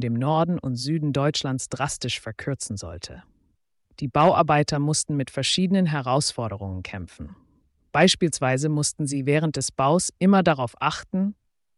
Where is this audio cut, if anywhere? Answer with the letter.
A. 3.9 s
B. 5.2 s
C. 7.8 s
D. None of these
A